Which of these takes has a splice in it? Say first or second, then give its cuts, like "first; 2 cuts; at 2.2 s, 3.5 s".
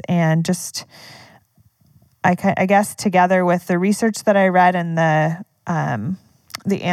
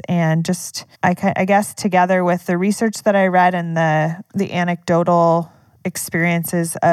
second; 2 cuts; at 0.9 s, 4.3 s